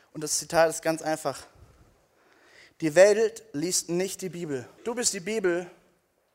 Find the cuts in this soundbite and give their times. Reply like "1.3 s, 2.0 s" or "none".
4.8 s